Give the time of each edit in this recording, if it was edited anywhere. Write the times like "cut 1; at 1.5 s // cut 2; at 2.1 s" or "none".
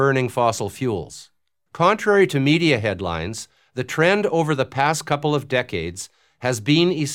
cut 1; at 1.7 s